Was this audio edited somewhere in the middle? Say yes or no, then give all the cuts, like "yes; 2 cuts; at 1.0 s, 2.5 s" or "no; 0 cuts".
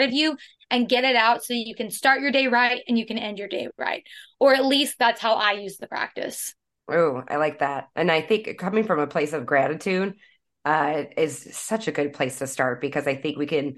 no; 0 cuts